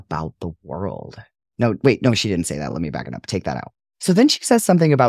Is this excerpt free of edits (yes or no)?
yes